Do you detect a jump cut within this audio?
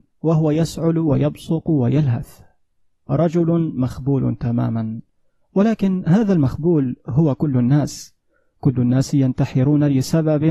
no; 0 cuts

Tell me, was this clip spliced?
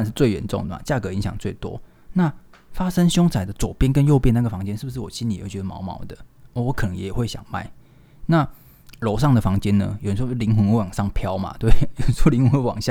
no; 0 cuts

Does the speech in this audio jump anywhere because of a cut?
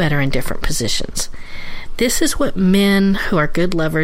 no; 0 cuts

